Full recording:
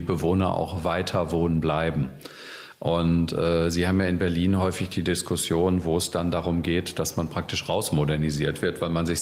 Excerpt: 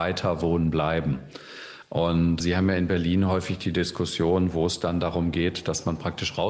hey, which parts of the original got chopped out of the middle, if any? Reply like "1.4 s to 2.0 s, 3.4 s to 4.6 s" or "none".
3.3 s to 3.7 s